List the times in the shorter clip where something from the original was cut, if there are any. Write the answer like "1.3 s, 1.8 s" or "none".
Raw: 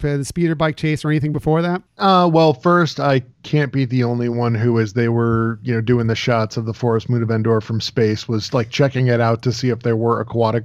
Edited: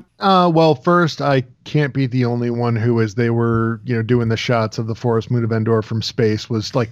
none